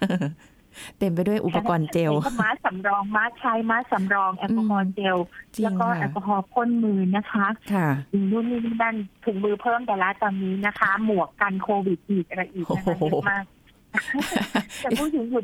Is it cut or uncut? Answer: uncut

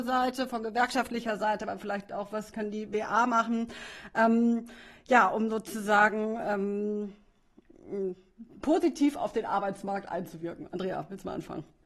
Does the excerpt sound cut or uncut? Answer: uncut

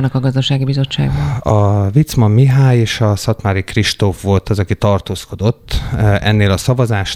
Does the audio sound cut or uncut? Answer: uncut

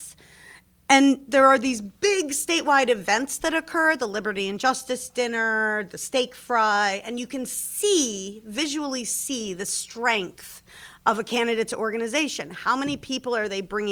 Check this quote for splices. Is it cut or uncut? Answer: uncut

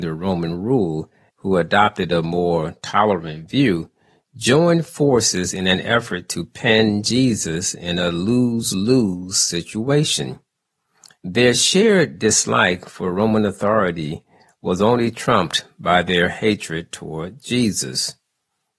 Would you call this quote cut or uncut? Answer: cut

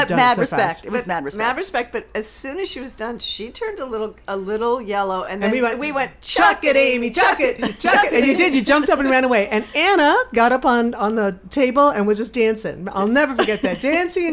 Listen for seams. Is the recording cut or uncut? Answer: uncut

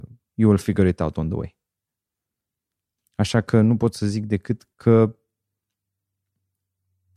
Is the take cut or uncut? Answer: cut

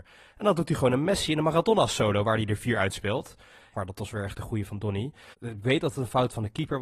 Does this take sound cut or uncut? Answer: cut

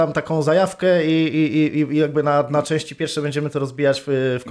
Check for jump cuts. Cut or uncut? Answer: uncut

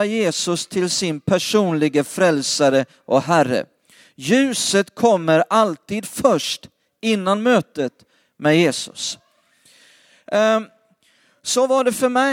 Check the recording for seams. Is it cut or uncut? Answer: uncut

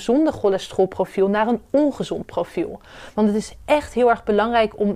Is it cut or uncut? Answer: cut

